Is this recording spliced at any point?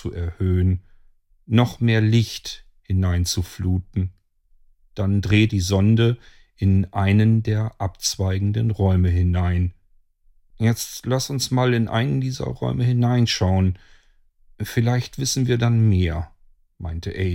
yes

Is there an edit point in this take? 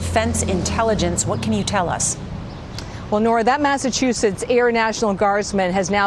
no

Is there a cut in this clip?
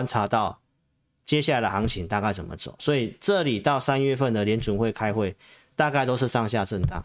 no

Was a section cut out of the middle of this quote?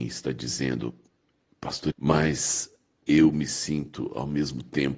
yes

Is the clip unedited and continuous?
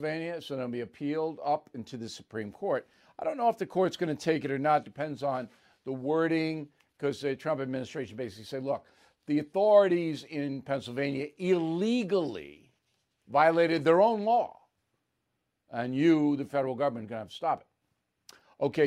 yes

